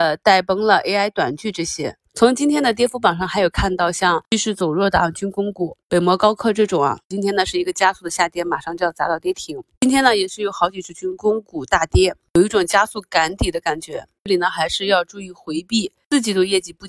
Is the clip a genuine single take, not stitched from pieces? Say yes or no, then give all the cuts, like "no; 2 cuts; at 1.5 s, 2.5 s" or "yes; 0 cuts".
no; 1 cut; at 2.1 s